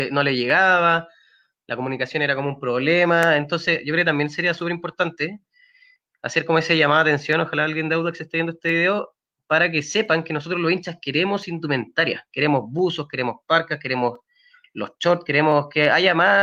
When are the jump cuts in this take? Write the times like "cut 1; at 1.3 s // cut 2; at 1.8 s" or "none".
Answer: none